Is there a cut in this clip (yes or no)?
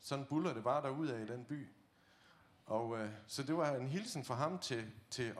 no